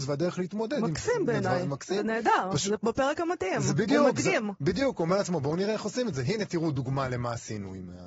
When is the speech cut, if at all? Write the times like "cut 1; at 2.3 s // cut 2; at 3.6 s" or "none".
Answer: none